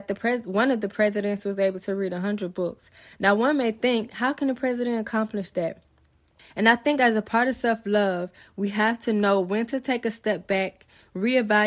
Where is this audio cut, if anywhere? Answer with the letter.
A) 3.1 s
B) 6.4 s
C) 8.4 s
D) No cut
B